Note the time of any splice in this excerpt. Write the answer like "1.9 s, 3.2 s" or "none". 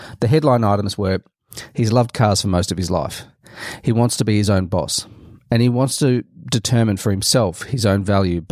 none